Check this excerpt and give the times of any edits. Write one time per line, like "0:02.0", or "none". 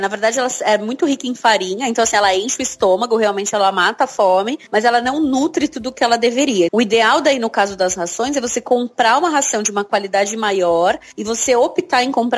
0:06.7